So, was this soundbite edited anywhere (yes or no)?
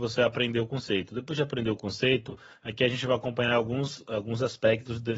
no